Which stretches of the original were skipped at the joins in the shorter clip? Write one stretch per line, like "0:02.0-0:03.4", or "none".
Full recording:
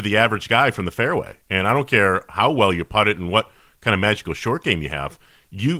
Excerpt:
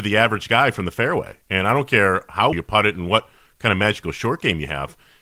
0:02.5-0:02.7